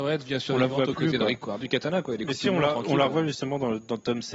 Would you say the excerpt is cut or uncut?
cut